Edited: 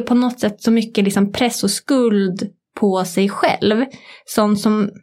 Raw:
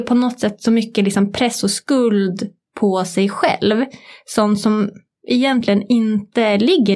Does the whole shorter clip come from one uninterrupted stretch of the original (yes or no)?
yes